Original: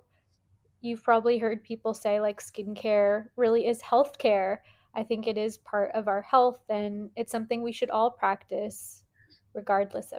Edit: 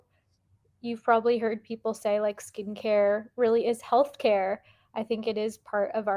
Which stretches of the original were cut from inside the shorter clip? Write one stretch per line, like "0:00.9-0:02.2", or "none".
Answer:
none

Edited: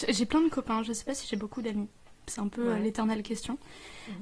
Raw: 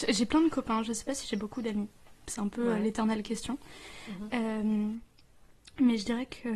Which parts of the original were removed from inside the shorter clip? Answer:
none

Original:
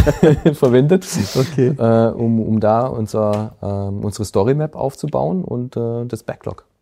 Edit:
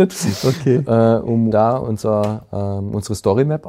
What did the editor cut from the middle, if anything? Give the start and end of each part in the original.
0:02.4-0:02.6

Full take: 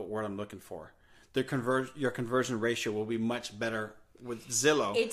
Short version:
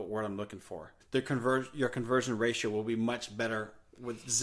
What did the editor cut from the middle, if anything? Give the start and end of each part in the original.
0:01.0-0:01.2

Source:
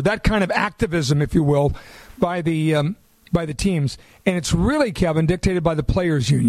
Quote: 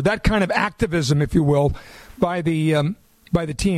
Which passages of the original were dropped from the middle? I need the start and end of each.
none

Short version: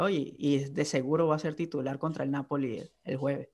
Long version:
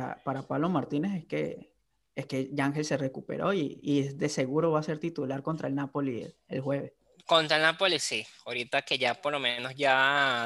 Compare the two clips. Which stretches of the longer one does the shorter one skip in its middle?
none

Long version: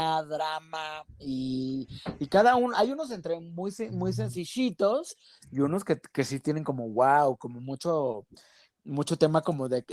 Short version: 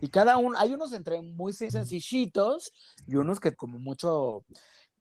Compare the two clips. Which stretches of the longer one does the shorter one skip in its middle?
0:03.9-0:04.1
0:06.0-0:07.4

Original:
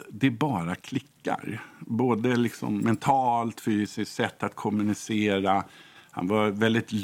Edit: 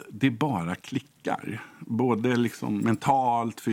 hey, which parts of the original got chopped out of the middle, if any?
none

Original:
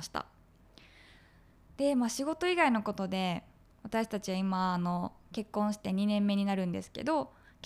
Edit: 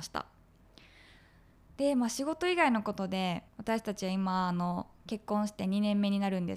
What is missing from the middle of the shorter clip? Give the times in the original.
0:03.5-0:03.7

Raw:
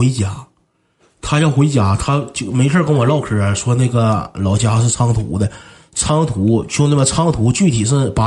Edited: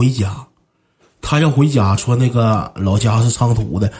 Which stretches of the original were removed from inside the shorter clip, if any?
0:02.0-0:03.6

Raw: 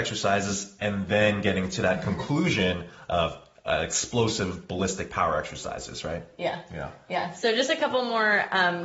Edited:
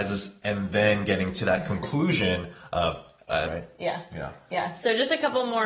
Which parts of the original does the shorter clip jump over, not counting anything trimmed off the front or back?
0:03.8-0:06.0

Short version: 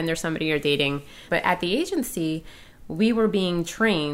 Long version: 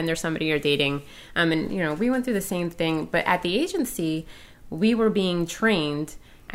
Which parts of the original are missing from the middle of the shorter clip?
0:01.3-0:03.1

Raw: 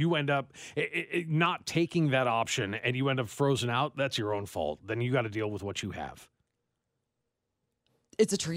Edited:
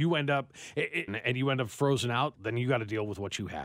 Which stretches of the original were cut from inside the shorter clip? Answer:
0:01.1-0:02.7
0:03.9-0:04.8

